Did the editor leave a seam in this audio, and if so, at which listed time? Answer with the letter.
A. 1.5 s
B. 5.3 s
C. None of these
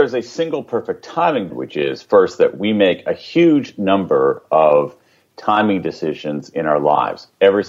A